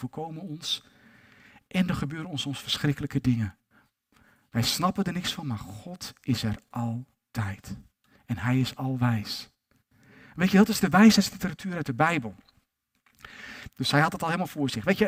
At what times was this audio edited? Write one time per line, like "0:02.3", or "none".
0:13.7